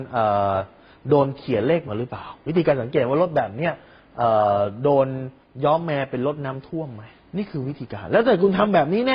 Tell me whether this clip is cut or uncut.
cut